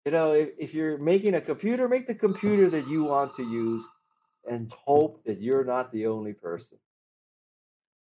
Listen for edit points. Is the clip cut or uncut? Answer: cut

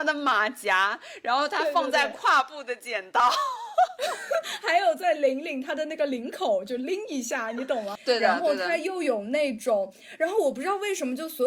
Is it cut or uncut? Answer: cut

